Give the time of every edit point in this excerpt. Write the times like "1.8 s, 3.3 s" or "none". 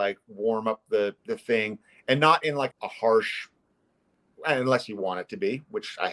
1.2 s, 2.7 s